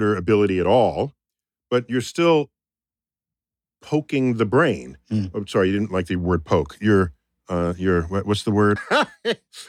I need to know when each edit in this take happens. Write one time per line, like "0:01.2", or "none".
0:08.8